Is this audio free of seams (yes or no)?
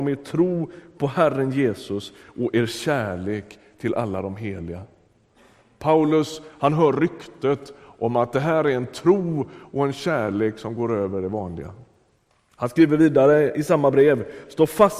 yes